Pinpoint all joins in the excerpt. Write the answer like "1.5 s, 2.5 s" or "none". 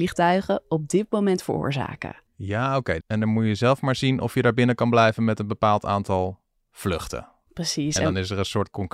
3.0 s